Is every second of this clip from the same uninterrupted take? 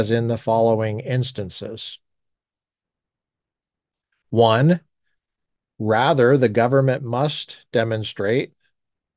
yes; 0 cuts

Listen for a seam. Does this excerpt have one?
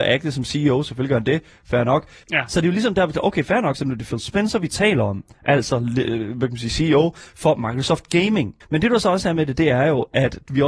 yes; 2 cuts; at 2.2 s, 8.6 s

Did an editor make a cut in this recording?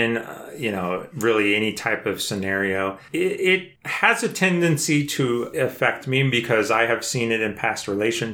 no; 0 cuts

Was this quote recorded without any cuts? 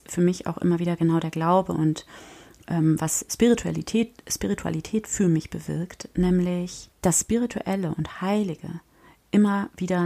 no; 1 cut; at 6.9 s

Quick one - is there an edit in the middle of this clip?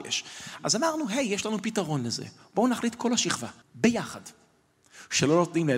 yes; 1 cut; at 3.6 s

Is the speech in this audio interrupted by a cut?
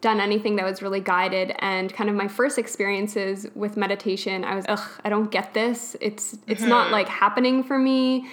yes; 1 cut; at 4.6 s

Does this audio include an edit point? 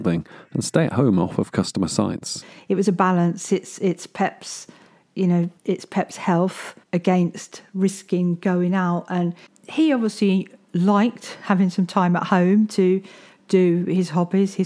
yes; 2 cuts; at 5.6 s, 6.8 s

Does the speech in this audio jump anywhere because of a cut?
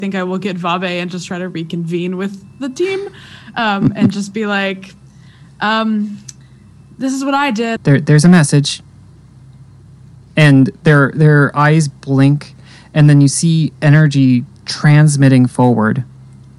yes; 1 cut; at 7.8 s

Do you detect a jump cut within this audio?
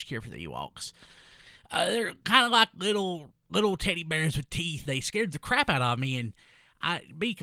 yes; 1 cut; at 4.9 s

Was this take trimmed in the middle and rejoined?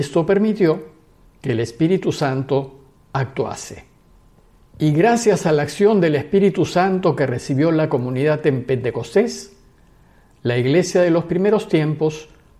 no; 0 cuts

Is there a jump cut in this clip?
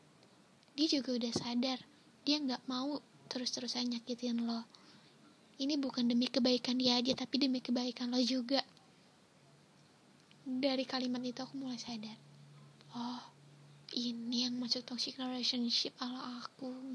no; 0 cuts

